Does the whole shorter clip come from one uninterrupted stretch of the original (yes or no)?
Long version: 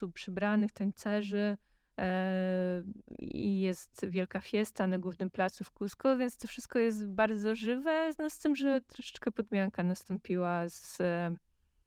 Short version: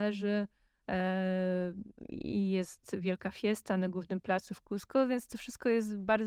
yes